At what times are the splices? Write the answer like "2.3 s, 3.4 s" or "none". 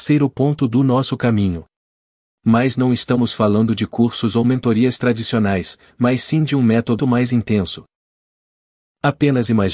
2.3 s, 7.0 s